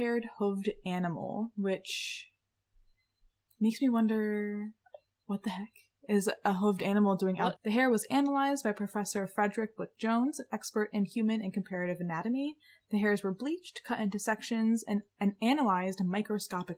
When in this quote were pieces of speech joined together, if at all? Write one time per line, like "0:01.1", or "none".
0:05.2
0:07.6